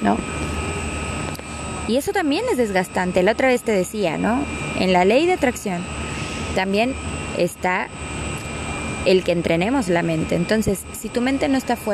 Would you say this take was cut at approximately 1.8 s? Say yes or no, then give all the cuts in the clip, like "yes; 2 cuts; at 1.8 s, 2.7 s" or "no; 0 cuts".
no; 1 cut; at 3.1 s